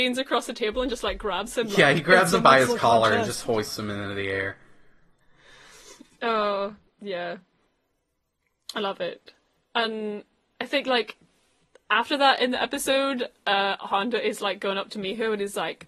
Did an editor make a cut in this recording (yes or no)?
no